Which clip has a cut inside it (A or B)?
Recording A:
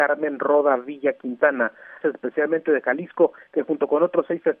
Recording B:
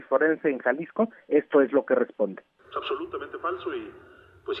A